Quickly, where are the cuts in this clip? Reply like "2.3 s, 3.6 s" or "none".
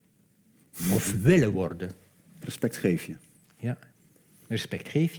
2.4 s